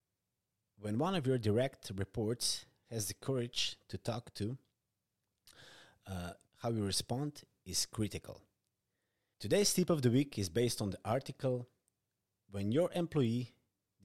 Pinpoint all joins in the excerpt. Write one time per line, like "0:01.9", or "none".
0:06.5
0:09.3